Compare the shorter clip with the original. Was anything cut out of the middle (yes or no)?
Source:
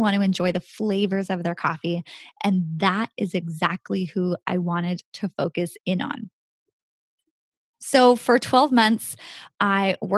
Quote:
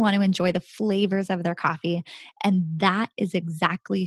no